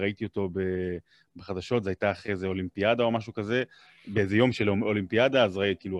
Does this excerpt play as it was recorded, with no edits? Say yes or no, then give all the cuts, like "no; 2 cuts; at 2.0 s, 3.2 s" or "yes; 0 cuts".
yes; 0 cuts